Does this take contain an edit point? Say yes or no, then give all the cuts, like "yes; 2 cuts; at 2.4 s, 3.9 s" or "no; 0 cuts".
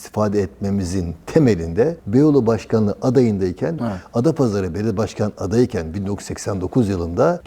yes; 1 cut; at 3.8 s